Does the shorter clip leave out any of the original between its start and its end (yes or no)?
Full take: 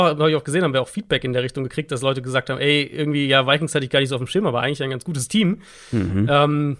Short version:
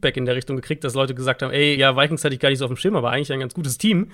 yes